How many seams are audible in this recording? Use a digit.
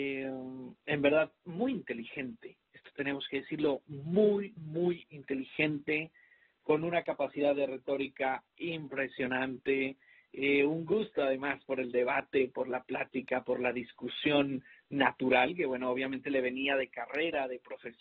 1